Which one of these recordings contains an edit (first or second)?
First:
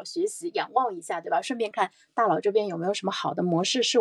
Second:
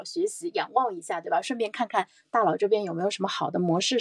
first